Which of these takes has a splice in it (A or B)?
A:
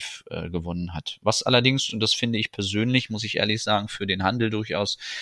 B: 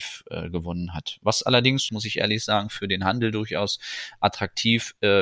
B